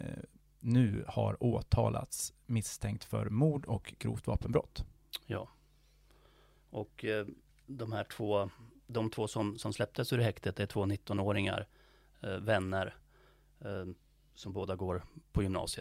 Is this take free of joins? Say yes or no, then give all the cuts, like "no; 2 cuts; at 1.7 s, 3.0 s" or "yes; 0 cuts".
yes; 0 cuts